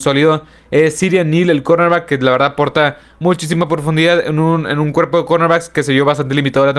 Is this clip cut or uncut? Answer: uncut